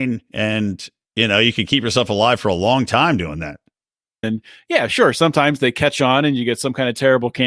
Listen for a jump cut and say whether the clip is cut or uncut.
cut